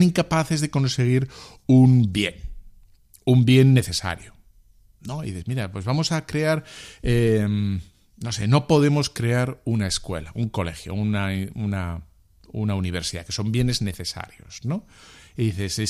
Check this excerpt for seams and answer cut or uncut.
uncut